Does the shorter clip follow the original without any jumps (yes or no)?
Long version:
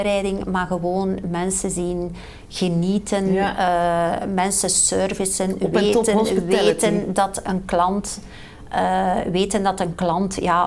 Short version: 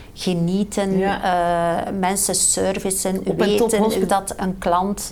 no